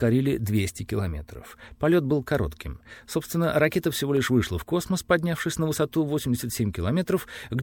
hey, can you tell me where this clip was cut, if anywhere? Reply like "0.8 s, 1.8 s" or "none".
1.8 s